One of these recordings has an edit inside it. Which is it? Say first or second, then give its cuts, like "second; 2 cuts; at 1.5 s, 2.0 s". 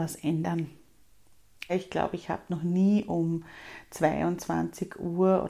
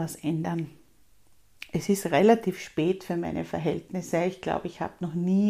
first; 1 cut; at 1.7 s